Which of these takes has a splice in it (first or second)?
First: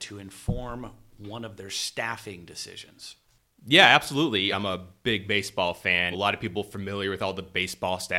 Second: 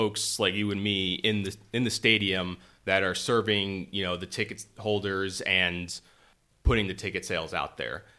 first